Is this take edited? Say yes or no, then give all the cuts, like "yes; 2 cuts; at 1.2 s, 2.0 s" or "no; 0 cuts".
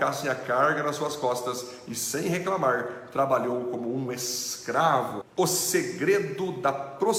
yes; 1 cut; at 5.2 s